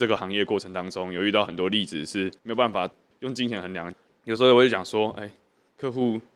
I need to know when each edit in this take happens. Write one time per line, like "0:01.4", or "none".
0:02.4